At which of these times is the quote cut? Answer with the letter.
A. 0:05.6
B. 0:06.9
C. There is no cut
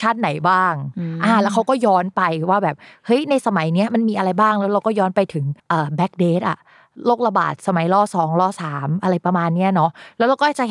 A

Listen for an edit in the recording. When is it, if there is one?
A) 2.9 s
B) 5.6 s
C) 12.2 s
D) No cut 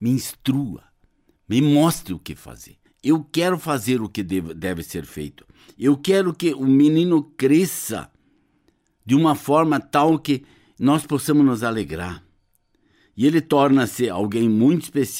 A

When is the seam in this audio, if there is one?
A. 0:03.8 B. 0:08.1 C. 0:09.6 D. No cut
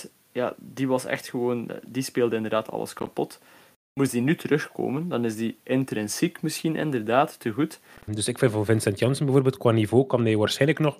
B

